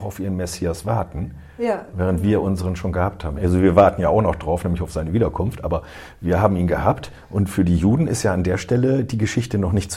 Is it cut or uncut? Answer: uncut